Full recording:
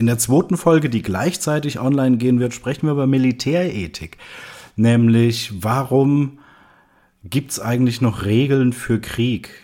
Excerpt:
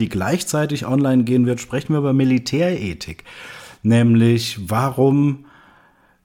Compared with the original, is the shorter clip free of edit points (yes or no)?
yes